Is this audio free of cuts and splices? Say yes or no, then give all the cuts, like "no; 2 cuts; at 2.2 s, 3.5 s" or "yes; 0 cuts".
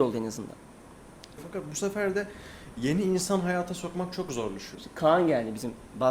no; 2 cuts; at 1.4 s, 4.7 s